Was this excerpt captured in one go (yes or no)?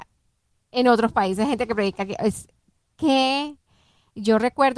yes